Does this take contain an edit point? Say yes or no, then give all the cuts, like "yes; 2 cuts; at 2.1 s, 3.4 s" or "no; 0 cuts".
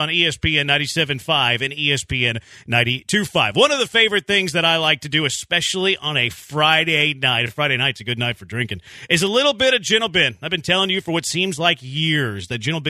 no; 0 cuts